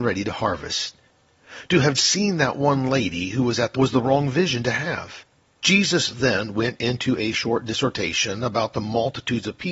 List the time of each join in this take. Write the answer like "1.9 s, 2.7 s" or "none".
2.0 s, 3.7 s, 5.6 s